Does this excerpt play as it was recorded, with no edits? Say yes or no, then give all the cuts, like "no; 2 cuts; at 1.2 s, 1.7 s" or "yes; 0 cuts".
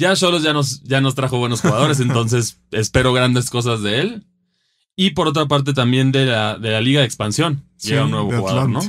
yes; 0 cuts